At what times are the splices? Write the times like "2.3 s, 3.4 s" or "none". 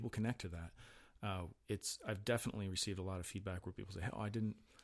1.6 s